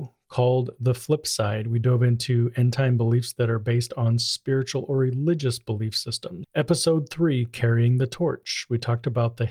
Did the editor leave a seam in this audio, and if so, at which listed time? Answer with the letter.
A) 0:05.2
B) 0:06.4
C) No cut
B